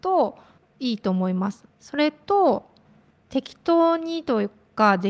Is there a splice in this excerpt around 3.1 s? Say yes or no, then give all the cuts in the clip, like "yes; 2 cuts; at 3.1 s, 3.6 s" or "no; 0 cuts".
no; 1 cut; at 1.7 s